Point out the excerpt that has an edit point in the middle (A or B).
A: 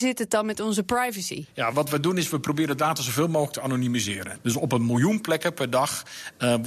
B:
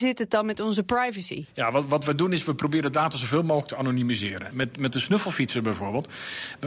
A